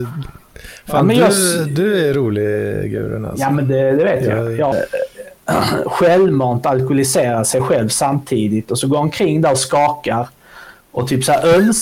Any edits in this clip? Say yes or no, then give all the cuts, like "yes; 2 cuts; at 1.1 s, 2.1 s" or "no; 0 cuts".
yes; 1 cut; at 4.7 s